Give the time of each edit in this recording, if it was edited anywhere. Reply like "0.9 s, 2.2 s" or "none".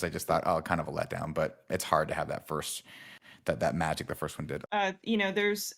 4.6 s